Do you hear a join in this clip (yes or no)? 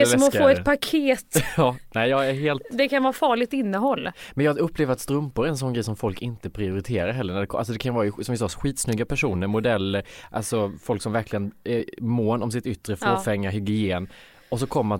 no